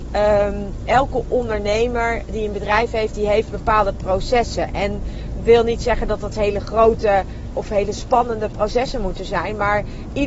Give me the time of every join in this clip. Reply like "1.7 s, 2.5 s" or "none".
7.5 s